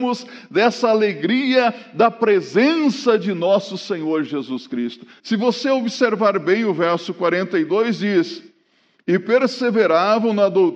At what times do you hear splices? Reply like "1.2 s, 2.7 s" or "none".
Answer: 5.2 s